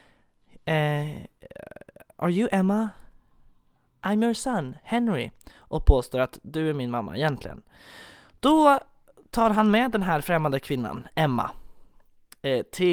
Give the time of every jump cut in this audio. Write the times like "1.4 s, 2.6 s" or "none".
none